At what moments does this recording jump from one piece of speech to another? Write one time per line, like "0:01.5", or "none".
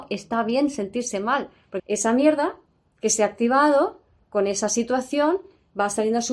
0:01.8